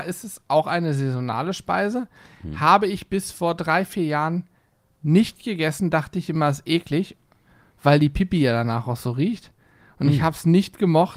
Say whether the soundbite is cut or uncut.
uncut